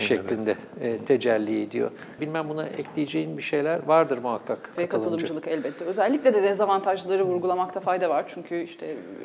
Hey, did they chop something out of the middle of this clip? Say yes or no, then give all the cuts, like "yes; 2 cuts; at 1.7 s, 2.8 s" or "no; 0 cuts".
yes; 2 cuts; at 2.2 s, 4.8 s